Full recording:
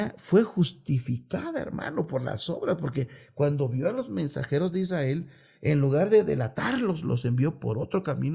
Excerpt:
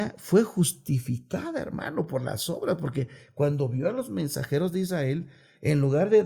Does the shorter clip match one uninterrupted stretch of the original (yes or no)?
yes